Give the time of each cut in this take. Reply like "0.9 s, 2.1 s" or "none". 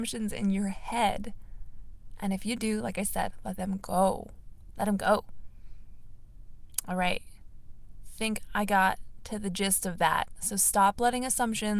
none